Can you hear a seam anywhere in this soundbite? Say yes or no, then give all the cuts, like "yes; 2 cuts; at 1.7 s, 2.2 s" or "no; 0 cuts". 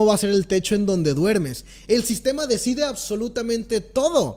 no; 0 cuts